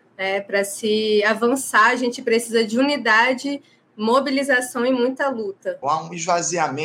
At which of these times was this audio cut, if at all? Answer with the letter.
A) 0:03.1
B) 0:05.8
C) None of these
B